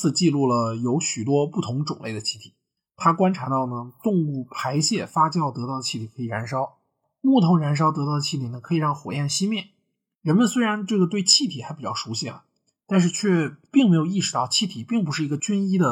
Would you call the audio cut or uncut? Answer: cut